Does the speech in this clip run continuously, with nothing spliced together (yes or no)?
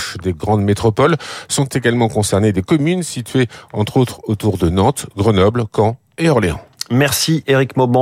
yes